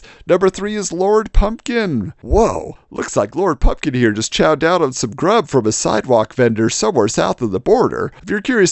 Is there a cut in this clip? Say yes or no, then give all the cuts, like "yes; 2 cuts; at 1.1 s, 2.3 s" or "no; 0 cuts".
no; 0 cuts